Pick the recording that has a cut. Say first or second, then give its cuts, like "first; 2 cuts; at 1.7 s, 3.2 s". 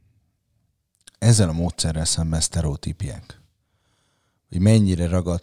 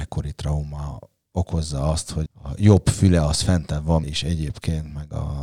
second; 2 cuts; at 2.3 s, 4.0 s